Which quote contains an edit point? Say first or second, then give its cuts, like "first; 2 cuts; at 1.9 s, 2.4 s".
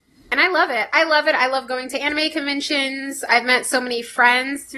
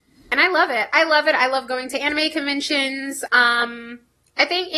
second; 1 cut; at 3.3 s